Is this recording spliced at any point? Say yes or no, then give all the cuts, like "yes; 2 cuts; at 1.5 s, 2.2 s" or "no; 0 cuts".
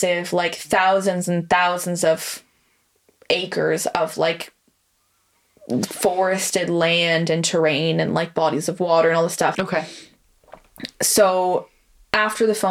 yes; 1 cut; at 9.5 s